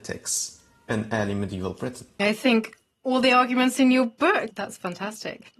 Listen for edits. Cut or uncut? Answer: cut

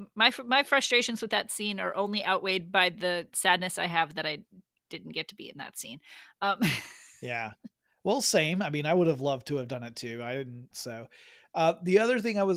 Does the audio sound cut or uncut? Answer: cut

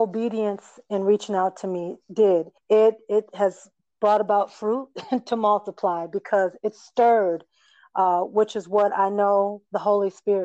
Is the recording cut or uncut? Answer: cut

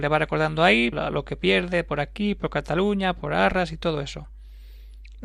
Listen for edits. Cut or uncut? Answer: cut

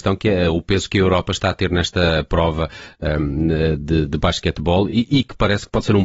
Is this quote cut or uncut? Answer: uncut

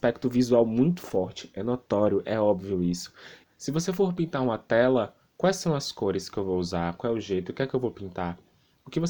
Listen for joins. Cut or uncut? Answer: cut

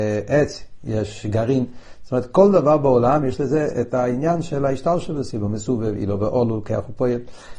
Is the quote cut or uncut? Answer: uncut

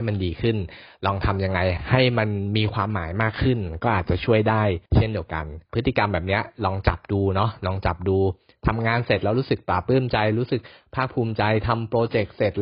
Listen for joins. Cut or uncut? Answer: cut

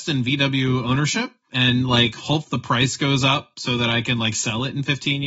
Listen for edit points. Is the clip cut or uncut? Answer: cut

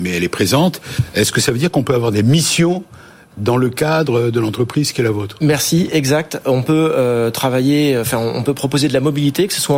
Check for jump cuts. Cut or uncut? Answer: uncut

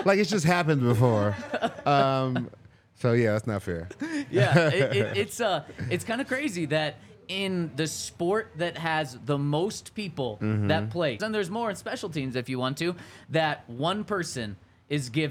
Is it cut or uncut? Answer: cut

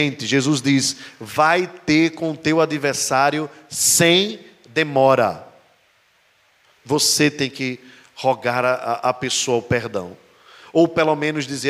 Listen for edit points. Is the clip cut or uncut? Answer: cut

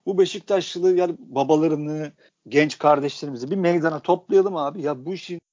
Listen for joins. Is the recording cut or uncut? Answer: uncut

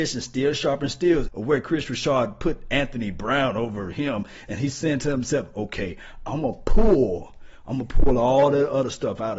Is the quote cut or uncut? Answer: cut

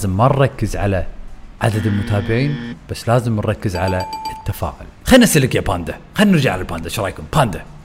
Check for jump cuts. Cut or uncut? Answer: cut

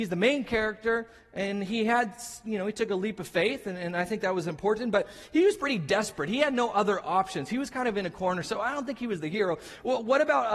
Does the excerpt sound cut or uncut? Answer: uncut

